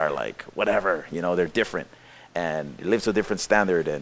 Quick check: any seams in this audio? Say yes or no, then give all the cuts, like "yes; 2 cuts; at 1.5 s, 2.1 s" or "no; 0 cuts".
no; 0 cuts